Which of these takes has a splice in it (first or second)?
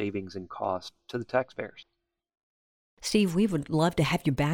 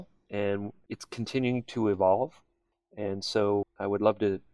second